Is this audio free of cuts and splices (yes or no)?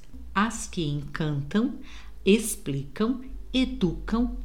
yes